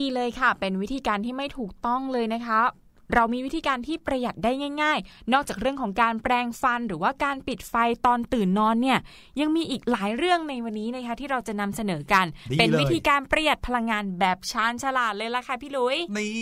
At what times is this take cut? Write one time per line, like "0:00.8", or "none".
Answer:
none